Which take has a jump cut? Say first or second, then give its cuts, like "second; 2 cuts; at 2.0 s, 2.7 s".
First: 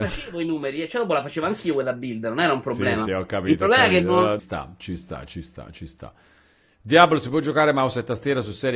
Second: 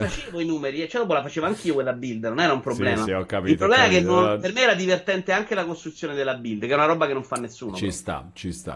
first; 1 cut; at 4.4 s